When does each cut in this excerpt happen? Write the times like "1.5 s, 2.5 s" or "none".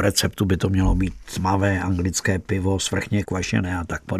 3.2 s